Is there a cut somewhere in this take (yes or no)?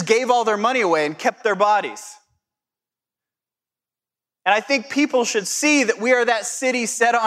no